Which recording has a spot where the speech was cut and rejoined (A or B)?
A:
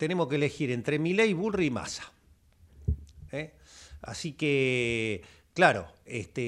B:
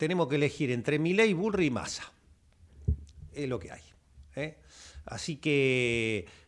A